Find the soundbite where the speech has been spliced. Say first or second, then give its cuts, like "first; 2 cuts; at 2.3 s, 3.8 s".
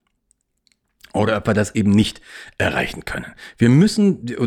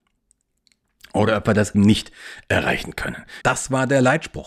second; 2 cuts; at 1.7 s, 3.4 s